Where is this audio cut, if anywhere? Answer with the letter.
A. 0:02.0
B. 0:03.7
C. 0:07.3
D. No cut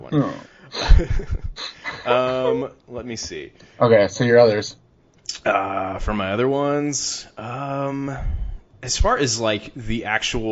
D